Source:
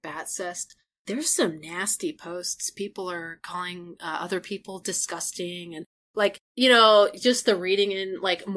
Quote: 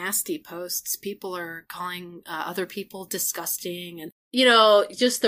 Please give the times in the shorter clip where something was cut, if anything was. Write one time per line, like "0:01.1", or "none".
0:04.2